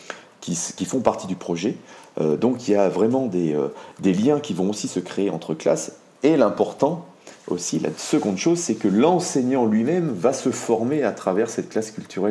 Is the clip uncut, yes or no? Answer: yes